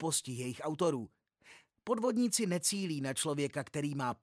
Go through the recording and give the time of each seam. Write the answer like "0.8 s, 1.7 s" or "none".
1.8 s